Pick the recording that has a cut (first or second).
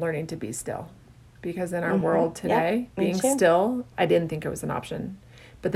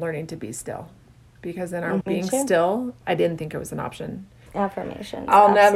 second